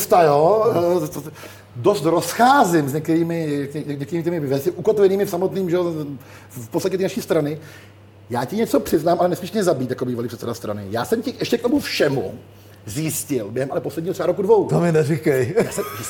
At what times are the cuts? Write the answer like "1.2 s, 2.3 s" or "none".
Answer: none